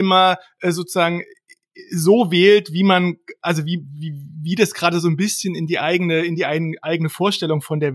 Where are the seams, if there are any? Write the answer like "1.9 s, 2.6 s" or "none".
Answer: none